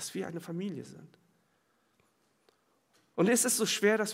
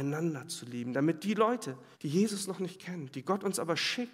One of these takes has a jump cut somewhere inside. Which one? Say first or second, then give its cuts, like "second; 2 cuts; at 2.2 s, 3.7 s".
second; 1 cut; at 1.9 s